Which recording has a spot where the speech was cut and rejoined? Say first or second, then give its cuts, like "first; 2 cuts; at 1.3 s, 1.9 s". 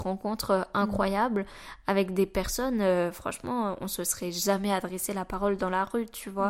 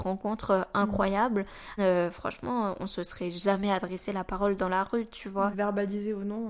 second; 2 cuts; at 1.8 s, 5.5 s